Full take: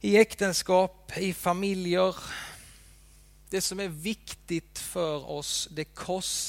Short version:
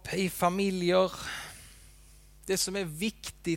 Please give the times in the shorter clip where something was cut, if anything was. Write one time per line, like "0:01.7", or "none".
none